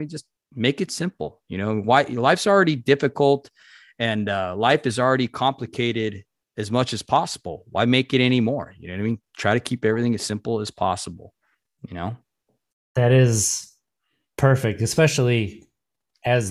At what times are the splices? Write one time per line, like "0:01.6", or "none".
none